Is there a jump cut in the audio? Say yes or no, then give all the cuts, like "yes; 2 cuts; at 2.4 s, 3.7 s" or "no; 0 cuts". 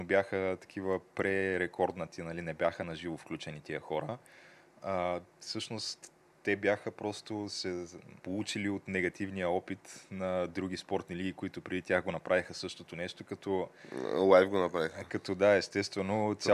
yes; 1 cut; at 8.2 s